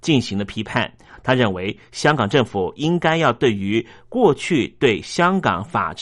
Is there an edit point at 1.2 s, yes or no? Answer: no